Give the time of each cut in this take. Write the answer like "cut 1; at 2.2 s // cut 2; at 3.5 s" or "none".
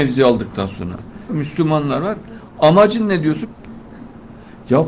cut 1; at 1.3 s // cut 2; at 3.4 s